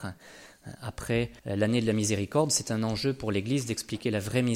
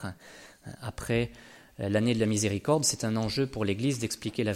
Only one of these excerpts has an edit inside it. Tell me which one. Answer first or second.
first